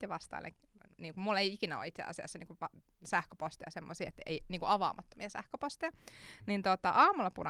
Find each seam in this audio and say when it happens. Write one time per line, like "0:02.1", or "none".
none